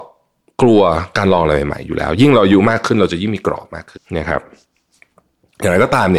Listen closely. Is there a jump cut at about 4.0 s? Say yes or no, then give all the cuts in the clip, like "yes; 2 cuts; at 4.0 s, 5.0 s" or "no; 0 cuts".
yes; 1 cut; at 4.0 s